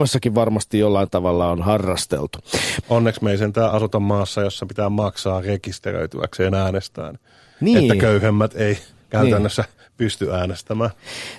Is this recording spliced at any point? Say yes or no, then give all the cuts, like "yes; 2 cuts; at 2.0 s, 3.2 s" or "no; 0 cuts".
yes; 1 cut; at 2.8 s